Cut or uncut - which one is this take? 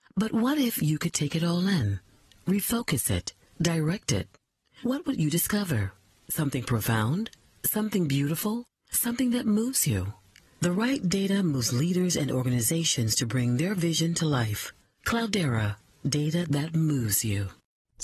cut